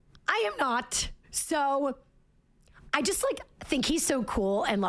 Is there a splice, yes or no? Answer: yes